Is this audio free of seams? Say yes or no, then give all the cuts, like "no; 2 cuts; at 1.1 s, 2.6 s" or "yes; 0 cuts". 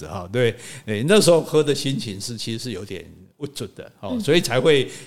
yes; 0 cuts